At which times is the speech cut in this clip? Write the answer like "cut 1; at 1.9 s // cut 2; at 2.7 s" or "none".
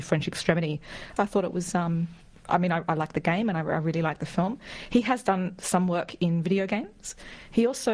cut 1; at 1.2 s